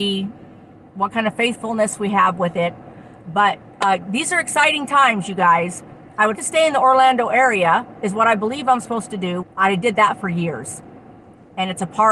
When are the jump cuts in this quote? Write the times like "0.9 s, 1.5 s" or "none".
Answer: 6.3 s, 9.4 s